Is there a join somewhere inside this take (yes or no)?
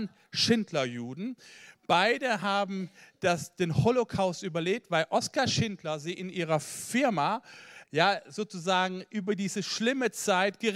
yes